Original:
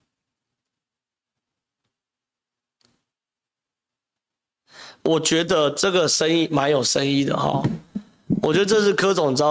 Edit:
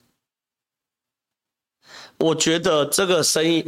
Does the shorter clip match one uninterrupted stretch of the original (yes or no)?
yes